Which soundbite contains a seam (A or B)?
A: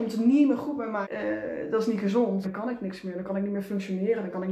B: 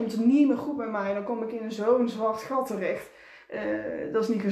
A